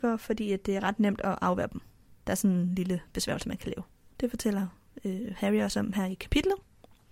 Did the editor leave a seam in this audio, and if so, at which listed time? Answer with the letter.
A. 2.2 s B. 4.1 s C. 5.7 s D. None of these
B